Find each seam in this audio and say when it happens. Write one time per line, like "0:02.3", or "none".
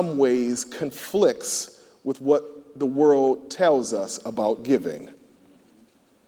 none

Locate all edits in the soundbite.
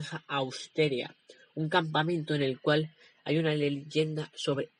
none

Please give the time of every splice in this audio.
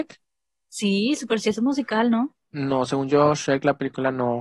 0:02.4

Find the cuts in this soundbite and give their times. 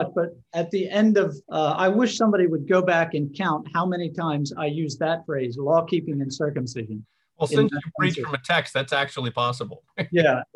0:01.4

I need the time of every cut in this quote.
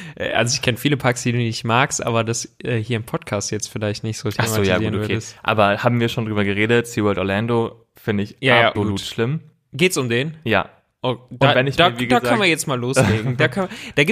0:08.8

